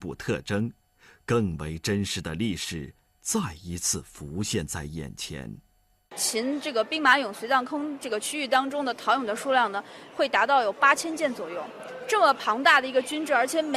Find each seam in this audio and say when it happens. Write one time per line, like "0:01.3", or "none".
none